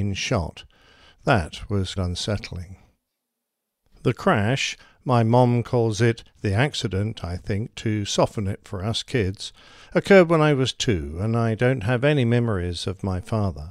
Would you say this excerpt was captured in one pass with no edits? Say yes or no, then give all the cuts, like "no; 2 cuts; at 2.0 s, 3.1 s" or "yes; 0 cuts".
no; 1 cut; at 2.0 s